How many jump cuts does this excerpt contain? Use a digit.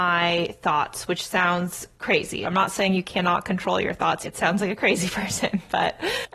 2